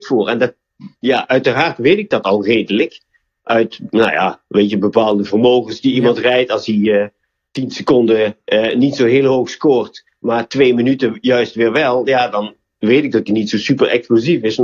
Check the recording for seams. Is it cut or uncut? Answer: uncut